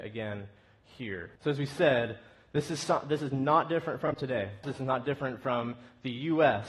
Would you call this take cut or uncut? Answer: cut